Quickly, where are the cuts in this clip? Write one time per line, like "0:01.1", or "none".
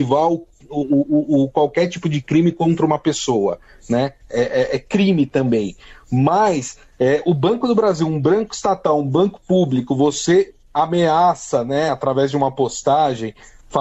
none